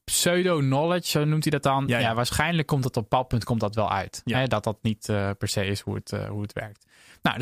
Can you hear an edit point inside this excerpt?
no; 0 cuts

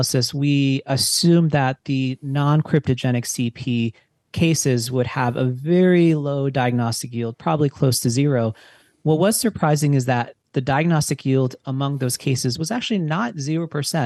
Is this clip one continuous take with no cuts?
yes; 0 cuts

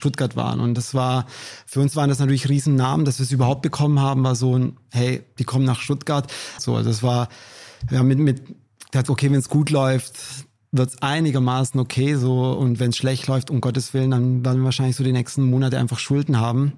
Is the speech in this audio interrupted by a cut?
yes; 1 cut; at 6.6 s

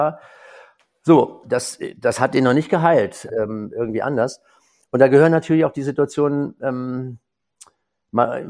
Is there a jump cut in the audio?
yes; 2 cuts; at 1.4 s, 3.3 s

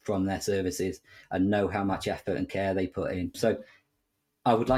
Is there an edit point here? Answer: yes; 1 cut; at 3.3 s

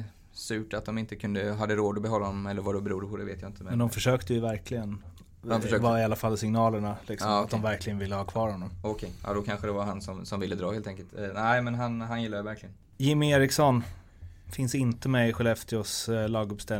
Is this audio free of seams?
yes; 0 cuts

